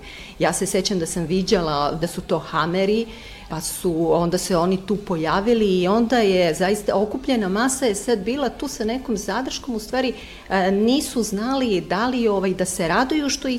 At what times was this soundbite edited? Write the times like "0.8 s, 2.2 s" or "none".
2.0 s, 3.5 s